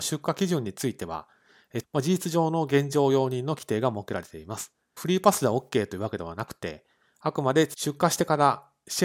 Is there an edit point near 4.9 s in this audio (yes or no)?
no